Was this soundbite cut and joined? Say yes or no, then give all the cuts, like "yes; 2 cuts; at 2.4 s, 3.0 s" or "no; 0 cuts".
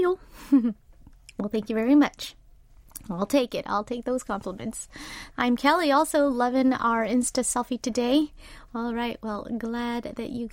yes; 2 cuts; at 5.3 s, 8.7 s